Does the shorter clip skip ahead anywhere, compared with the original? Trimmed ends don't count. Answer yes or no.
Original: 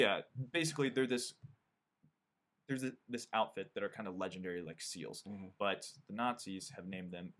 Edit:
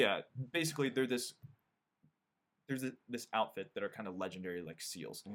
no